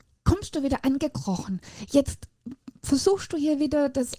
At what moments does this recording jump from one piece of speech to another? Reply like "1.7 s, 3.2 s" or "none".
none